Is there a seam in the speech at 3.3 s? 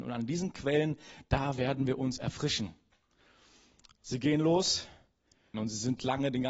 no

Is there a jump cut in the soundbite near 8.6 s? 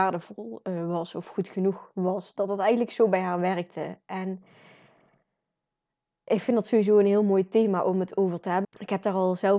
yes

